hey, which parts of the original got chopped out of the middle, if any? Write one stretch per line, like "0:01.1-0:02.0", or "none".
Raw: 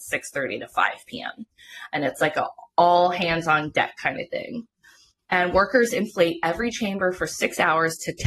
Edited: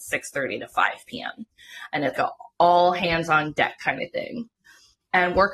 0:02.1-0:02.3